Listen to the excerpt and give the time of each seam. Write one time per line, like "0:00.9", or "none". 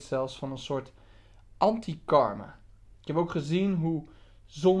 0:03.0